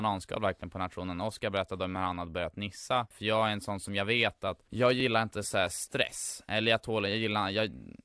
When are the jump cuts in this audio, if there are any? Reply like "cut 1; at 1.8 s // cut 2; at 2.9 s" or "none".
cut 1; at 3.1 s